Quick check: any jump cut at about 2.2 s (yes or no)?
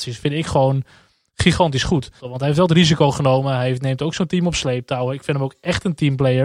yes